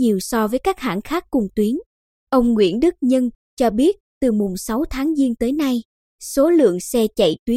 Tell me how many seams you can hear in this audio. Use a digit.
2